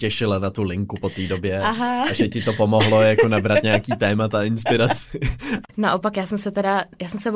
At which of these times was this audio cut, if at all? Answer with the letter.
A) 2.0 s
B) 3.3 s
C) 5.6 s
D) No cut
C